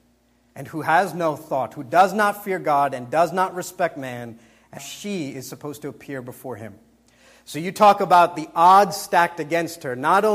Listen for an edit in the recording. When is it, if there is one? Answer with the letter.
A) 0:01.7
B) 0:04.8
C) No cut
B